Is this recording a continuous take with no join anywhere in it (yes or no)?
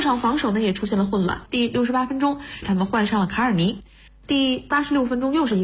no